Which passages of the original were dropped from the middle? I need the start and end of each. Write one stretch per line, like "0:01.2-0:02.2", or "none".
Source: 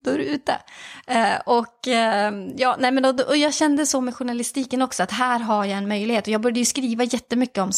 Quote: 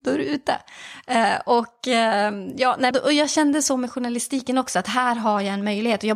0:02.9-0:03.1